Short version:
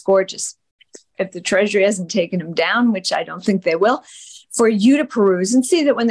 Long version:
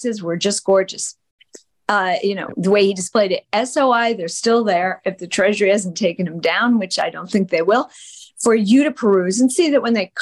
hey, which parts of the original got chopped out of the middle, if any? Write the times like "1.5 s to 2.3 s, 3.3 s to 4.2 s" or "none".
1.7 s to 5.0 s